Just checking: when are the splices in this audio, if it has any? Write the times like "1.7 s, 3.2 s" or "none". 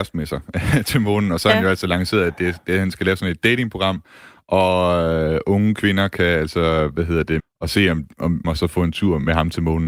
7.4 s, 8.4 s